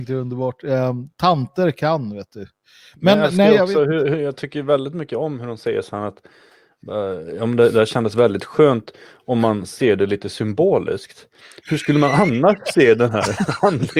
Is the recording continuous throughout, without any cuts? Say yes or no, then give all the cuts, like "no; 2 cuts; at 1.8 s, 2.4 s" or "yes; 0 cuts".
yes; 0 cuts